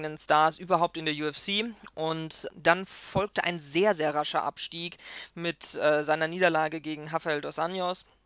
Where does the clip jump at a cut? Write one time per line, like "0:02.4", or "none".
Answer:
0:02.5